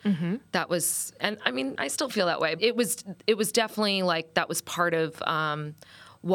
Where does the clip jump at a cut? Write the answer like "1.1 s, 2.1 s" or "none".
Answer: 2.6 s

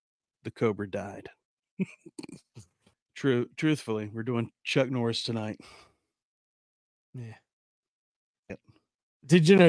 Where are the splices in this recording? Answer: 2.9 s, 8.5 s

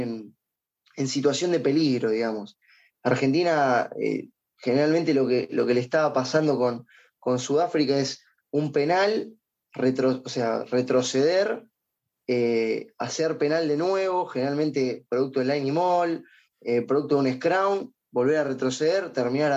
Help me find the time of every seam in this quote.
none

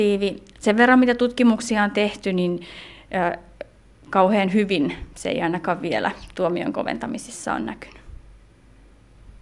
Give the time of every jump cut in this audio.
none

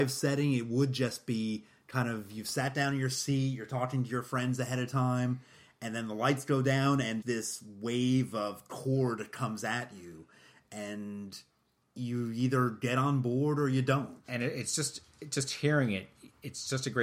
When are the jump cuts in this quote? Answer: 7.2 s

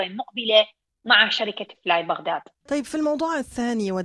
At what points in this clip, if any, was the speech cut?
2.6 s

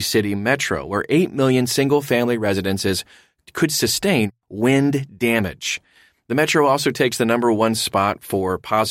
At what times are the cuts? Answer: none

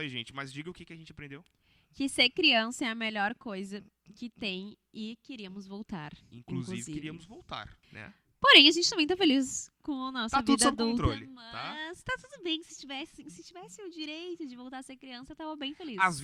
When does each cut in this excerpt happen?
7.8 s

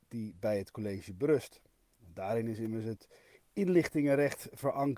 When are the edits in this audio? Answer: none

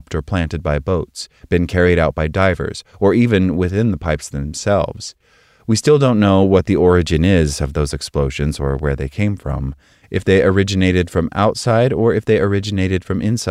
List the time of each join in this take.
none

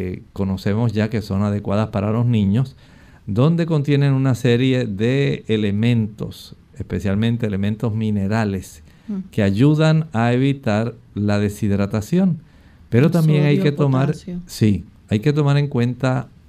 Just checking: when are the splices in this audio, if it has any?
none

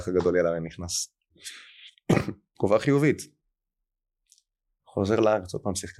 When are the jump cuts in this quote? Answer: 1.3 s, 2.5 s

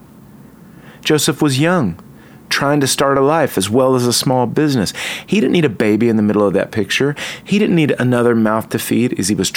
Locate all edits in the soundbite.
none

